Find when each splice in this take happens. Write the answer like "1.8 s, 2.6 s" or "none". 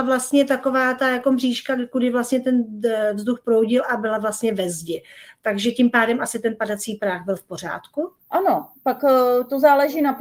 8.2 s